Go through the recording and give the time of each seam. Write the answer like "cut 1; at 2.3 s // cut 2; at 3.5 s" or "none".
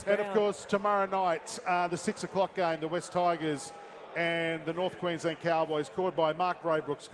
none